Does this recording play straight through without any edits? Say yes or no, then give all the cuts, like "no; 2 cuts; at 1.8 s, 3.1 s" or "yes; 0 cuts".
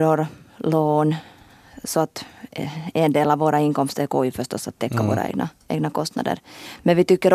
yes; 0 cuts